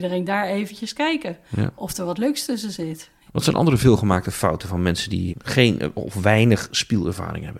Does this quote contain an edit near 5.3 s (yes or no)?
yes